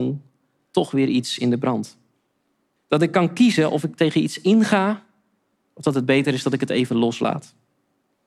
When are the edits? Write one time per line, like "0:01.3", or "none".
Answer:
0:02.8